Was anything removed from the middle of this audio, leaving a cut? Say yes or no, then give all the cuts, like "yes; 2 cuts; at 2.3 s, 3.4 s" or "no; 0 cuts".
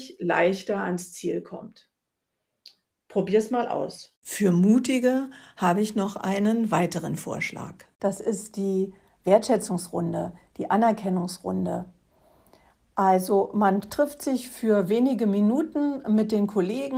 no; 0 cuts